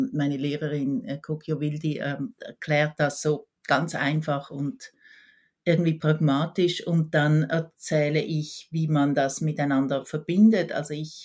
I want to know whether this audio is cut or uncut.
uncut